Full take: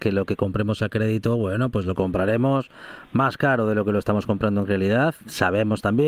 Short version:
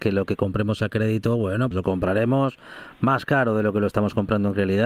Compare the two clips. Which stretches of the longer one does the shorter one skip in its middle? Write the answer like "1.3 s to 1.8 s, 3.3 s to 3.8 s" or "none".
1.7 s to 1.8 s